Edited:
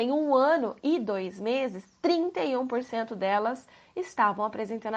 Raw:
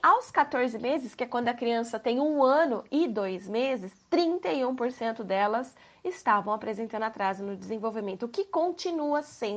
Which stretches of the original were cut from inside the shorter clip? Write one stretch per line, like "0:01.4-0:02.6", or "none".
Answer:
none